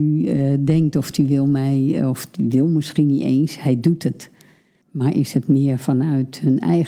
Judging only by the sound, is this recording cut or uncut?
cut